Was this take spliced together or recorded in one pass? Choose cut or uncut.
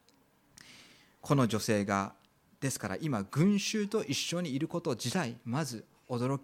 uncut